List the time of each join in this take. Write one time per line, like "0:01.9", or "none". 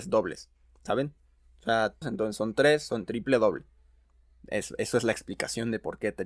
0:02.0